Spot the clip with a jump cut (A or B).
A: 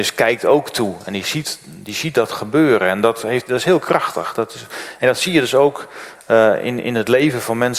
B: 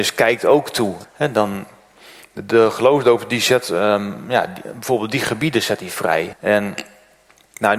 B